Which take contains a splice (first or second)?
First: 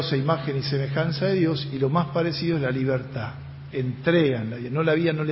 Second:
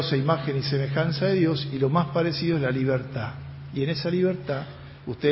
first